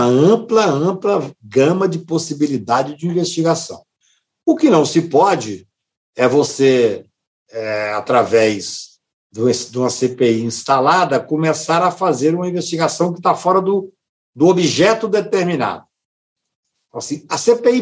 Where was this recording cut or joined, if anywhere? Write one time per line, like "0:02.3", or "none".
none